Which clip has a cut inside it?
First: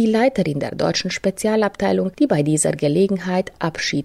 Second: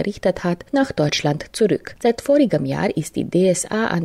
second; 1 cut; at 2.0 s

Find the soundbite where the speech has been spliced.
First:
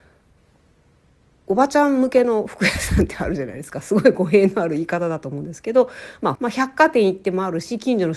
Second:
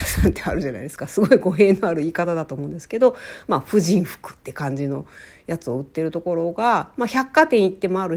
first; 1 cut; at 6.4 s

